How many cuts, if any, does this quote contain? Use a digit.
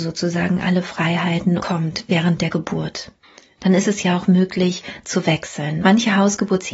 2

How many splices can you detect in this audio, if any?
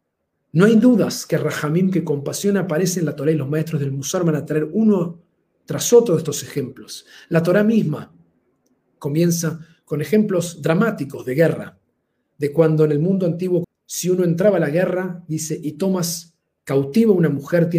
1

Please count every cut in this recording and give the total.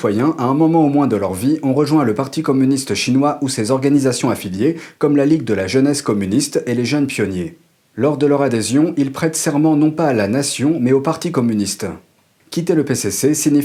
0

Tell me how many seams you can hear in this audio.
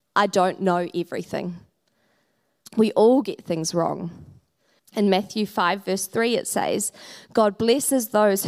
2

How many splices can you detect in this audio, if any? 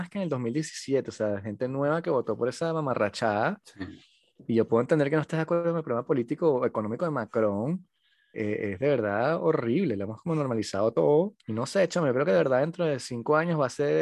2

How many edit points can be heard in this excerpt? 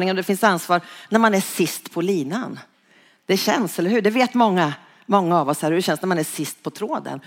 0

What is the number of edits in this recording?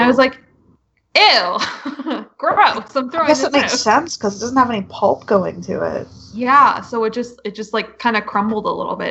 0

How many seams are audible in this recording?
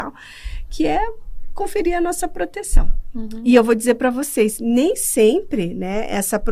0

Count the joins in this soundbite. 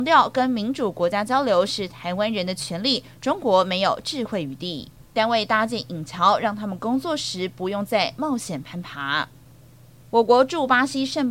1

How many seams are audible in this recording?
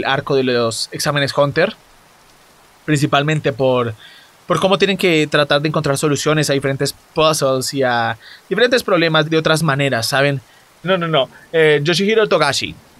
2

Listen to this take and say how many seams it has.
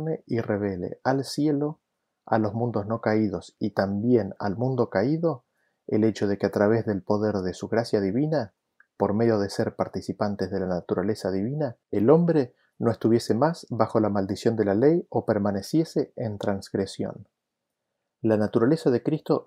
1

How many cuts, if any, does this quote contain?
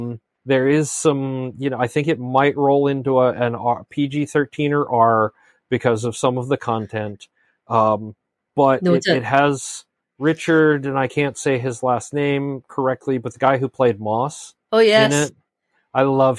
1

